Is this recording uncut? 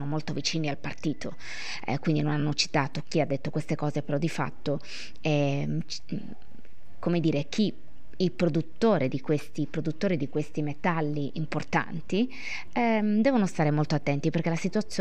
yes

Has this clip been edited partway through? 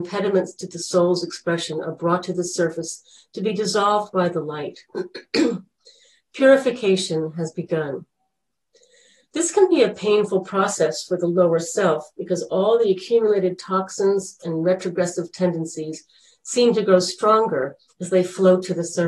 yes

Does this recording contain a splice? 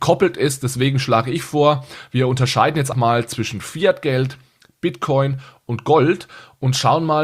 yes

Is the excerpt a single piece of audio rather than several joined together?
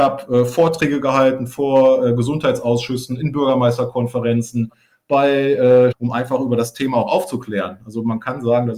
no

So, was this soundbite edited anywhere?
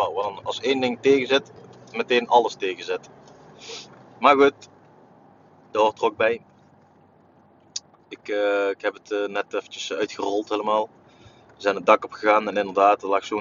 no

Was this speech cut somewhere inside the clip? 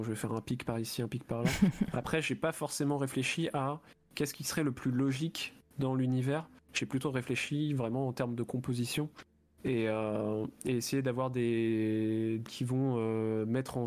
yes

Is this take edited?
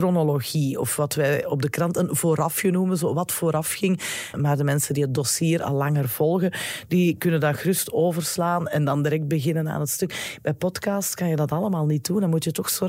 yes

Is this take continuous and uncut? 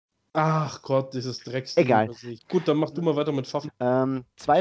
no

